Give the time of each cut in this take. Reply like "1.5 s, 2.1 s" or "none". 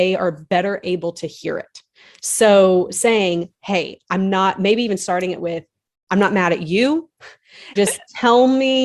7.8 s